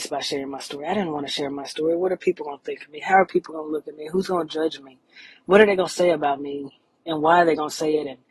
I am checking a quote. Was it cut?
no; 0 cuts

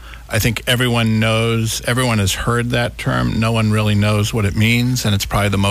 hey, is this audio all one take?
yes; 0 cuts

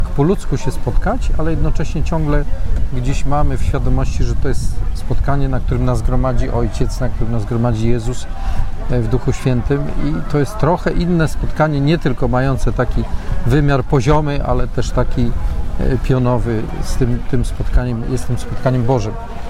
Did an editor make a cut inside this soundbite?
no; 0 cuts

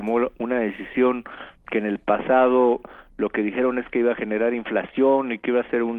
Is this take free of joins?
yes; 0 cuts

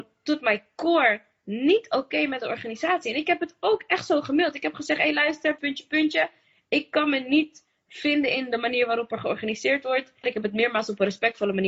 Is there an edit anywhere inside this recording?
yes; 2 cuts; at 5.6 s, 10.2 s

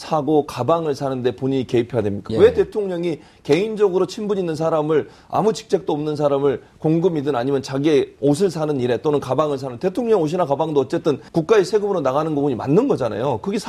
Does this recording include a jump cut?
yes; 2 cuts; at 2.3 s, 11.3 s

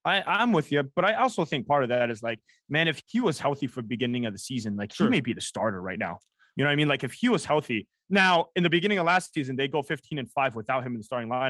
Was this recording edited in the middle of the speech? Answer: no; 0 cuts

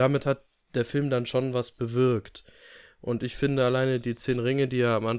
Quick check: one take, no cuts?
yes; 0 cuts

